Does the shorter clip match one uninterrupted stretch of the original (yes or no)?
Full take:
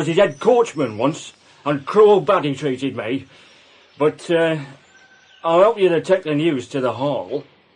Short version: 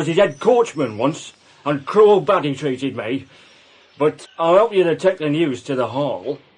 no